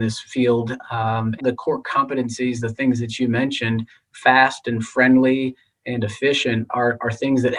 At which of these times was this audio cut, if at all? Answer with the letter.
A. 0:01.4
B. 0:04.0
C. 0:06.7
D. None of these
A